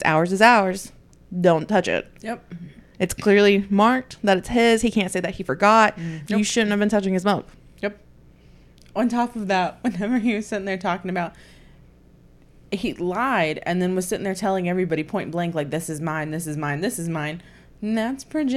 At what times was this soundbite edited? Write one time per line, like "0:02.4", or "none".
0:06.3